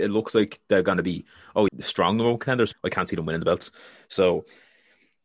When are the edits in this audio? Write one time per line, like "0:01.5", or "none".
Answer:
0:01.7
0:02.7